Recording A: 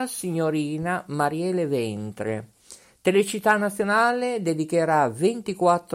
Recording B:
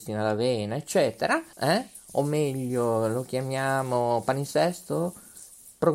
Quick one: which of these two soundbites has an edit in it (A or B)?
B